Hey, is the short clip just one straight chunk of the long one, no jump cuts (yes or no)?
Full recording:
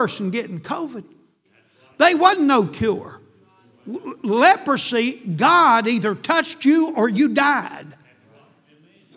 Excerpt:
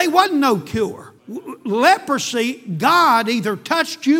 no